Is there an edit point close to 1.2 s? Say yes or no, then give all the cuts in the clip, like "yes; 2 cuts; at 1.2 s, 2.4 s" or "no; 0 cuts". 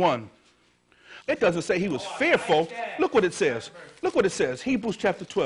yes; 1 cut; at 1.2 s